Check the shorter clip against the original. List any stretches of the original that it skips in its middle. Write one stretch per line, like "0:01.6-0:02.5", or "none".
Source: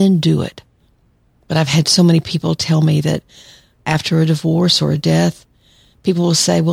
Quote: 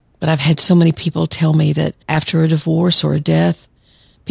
0:03.3-0:03.8